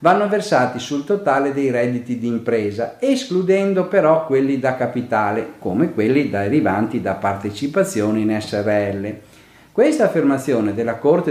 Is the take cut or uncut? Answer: uncut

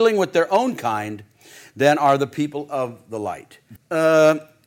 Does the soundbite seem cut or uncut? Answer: cut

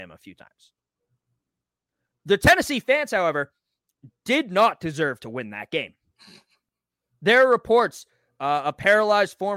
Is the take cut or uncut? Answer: uncut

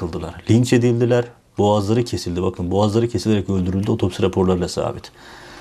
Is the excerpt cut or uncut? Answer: uncut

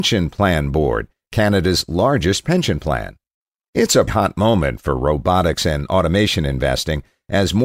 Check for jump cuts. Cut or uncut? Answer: cut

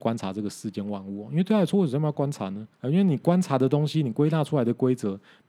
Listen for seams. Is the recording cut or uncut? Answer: cut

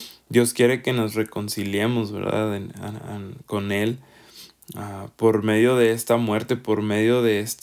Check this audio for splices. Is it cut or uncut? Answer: uncut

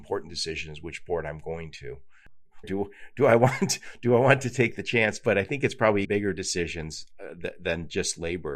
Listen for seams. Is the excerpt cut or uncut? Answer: cut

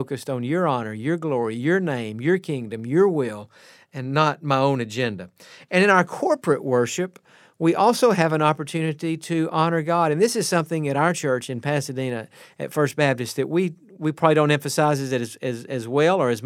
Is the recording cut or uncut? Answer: uncut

